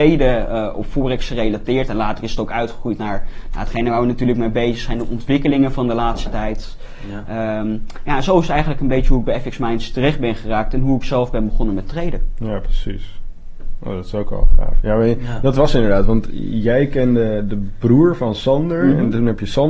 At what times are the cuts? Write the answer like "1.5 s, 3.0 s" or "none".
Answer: none